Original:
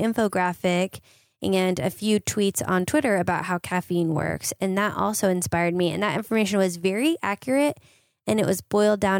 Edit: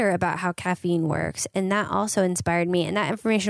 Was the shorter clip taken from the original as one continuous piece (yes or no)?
yes